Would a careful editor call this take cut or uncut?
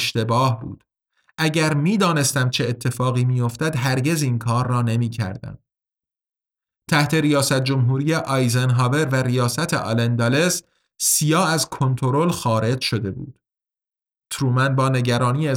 uncut